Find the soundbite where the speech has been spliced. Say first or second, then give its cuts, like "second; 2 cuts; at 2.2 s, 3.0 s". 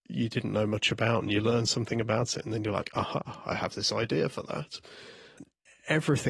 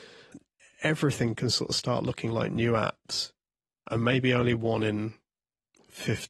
second; 1 cut; at 3.8 s